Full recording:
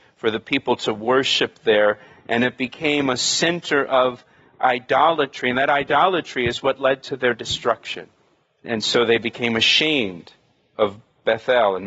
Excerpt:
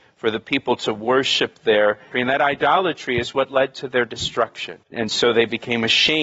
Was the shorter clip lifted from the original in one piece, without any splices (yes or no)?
no